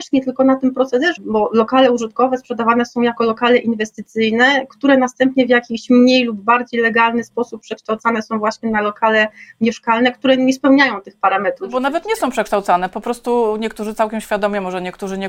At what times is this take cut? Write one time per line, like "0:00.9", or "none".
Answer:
0:01.2